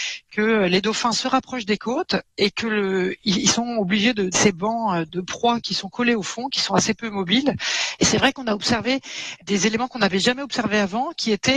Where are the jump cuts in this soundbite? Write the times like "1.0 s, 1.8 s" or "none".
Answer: 4.3 s, 8.0 s